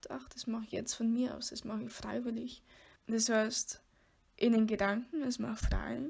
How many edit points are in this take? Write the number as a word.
one